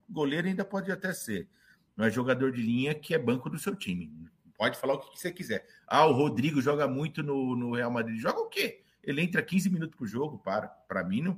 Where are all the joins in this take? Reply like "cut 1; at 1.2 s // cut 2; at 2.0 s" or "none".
none

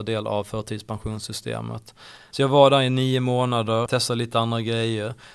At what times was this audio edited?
cut 1; at 2.3 s // cut 2; at 3.9 s

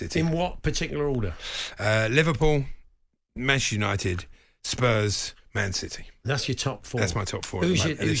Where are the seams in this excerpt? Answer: none

